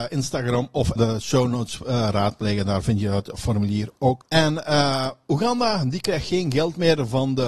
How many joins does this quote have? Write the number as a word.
two